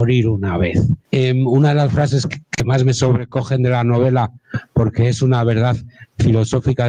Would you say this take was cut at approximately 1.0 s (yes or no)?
yes